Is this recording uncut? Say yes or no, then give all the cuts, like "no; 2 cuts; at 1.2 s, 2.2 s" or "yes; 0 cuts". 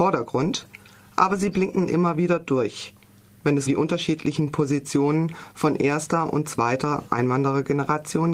no; 1 cut; at 3.7 s